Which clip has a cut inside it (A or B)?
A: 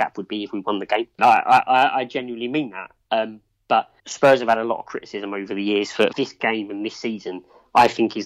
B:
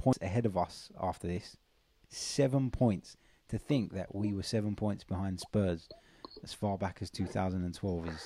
A